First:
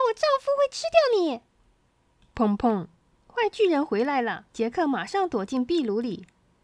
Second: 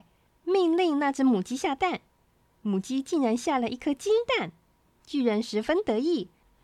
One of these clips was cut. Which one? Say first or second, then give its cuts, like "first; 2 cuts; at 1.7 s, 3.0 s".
first; 2 cuts; at 2.3 s, 4.5 s